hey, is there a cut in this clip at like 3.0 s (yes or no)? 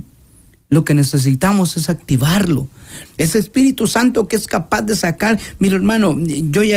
yes